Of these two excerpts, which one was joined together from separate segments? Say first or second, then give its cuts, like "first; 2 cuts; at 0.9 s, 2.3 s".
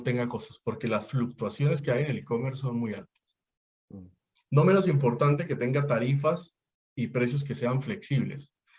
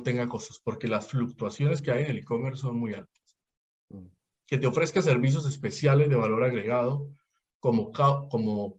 first; 1 cut; at 4.4 s